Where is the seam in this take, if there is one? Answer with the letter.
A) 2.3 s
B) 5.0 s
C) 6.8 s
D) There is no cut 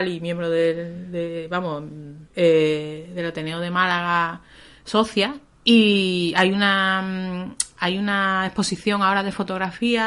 A